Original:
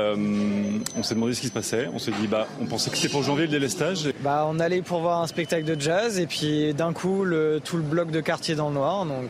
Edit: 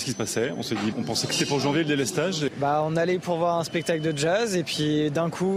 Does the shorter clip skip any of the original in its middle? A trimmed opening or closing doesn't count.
yes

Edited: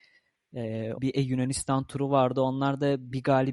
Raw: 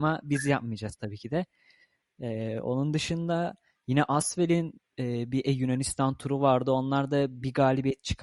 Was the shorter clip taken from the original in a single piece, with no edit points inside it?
no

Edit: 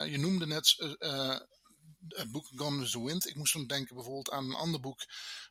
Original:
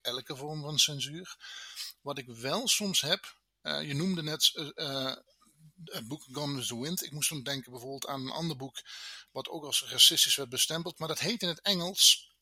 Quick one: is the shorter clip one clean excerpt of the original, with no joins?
yes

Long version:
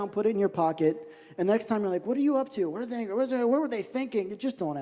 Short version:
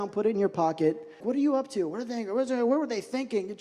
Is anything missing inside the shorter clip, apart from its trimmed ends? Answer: yes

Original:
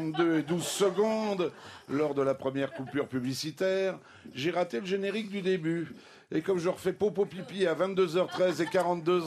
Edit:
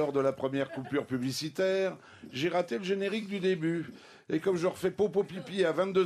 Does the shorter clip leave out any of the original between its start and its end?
no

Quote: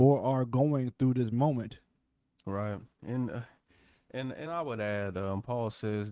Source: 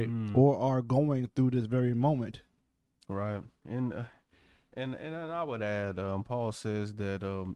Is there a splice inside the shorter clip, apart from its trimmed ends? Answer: yes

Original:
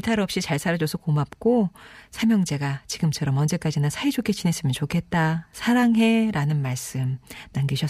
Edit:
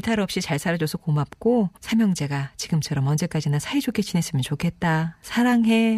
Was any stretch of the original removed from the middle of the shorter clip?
yes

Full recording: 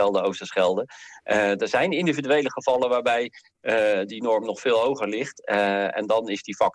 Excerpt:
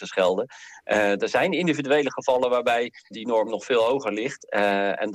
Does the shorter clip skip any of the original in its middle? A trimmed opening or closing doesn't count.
yes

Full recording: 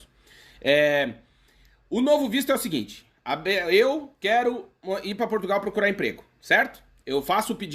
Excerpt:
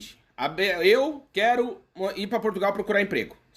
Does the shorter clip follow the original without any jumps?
yes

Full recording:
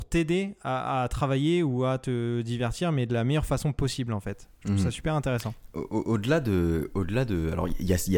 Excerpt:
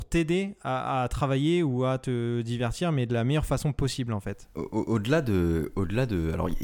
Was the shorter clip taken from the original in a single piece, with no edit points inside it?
no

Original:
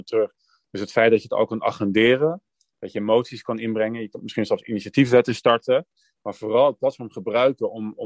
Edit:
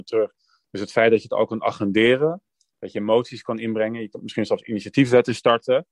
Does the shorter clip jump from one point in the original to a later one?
no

